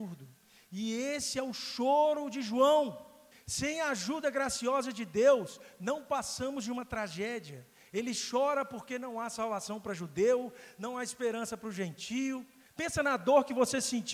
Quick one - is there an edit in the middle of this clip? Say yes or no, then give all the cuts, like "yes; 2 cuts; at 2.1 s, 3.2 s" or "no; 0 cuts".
yes; 2 cuts; at 3.3 s, 12.7 s